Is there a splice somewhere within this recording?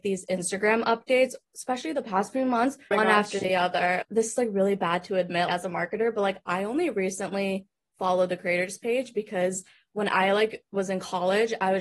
no; 0 cuts

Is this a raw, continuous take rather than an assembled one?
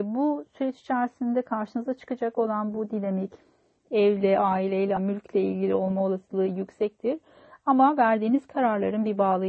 no; 1 cut; at 5.0 s

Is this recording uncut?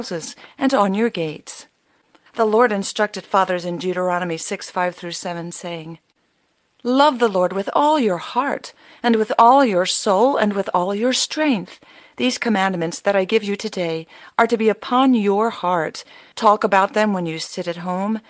no; 2 cuts; at 2.3 s, 16.3 s

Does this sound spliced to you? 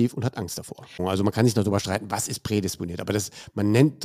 yes; 1 cut; at 1.0 s

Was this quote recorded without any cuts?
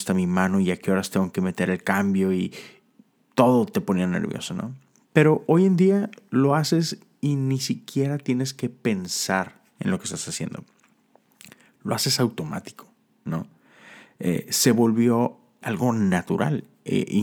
no; 1 cut; at 15.6 s

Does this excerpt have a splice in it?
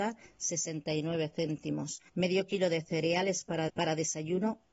yes; 2 cuts; at 2.1 s, 3.7 s

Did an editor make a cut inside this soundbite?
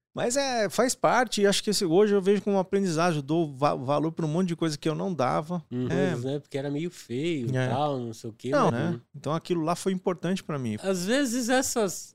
yes; 3 cuts; at 5.9 s, 8.7 s, 10.8 s

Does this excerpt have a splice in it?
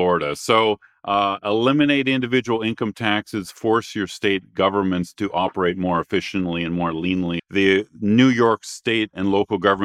yes; 1 cut; at 7.4 s

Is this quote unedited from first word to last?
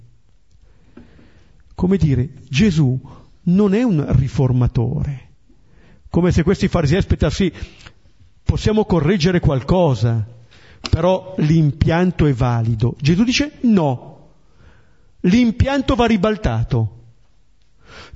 yes; 0 cuts

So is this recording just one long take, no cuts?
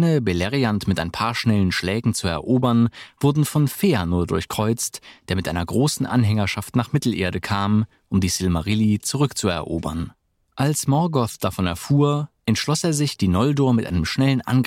yes; 0 cuts

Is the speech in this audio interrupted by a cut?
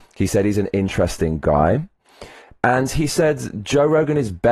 no; 0 cuts

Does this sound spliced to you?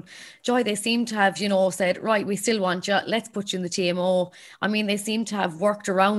no; 0 cuts

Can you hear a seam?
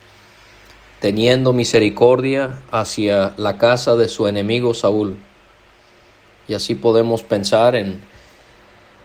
no; 0 cuts

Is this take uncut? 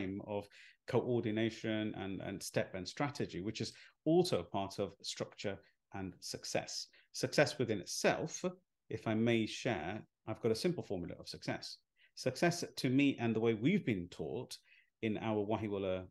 yes; 0 cuts

